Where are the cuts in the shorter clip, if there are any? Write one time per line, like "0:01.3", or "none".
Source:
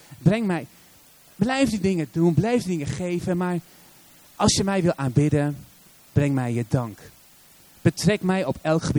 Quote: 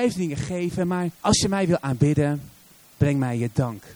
0:01.2